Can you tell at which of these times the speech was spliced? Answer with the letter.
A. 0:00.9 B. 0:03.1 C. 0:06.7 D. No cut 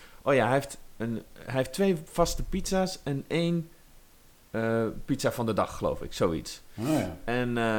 D